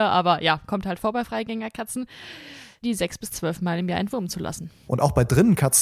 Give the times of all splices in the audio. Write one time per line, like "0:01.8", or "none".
0:02.8
0:04.9

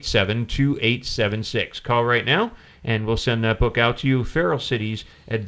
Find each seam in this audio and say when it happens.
none

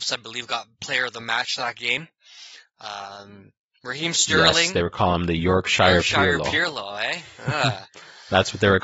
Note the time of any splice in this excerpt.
none

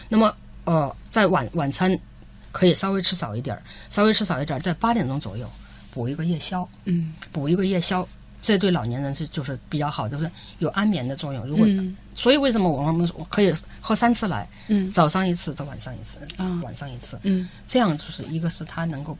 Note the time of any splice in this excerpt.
0:15.6
0:16.6

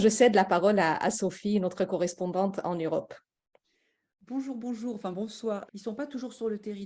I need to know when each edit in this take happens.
0:05.7

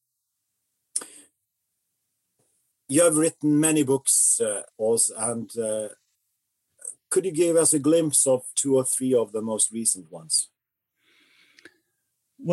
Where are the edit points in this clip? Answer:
0:04.7
0:08.5

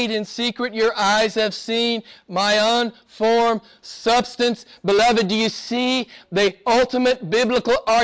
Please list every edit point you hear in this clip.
none

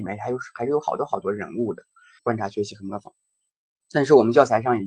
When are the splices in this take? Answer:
0:02.2

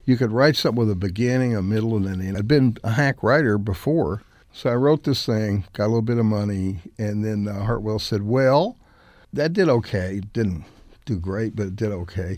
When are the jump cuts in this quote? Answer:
0:02.3

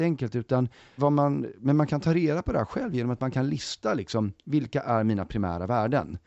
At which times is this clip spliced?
0:01.0

